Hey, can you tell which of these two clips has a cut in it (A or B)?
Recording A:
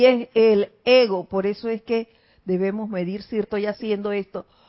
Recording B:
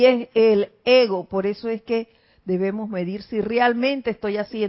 A